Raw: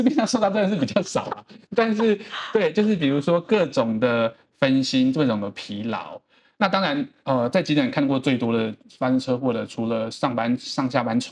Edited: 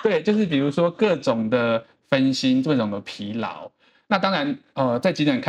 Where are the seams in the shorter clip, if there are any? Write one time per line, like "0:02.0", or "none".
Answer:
none